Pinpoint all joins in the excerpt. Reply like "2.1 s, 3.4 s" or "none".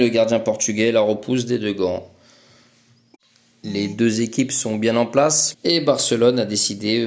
5.5 s